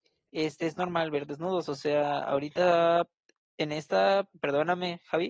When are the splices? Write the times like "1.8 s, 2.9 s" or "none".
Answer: 4.3 s